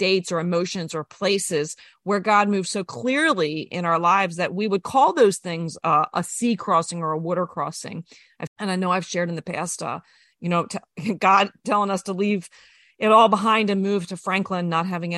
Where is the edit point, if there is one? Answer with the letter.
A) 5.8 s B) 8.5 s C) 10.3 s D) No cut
B